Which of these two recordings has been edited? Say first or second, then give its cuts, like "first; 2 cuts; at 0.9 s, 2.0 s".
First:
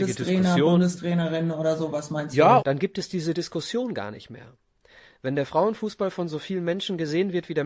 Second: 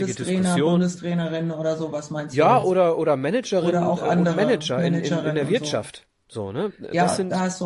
first; 1 cut; at 2.6 s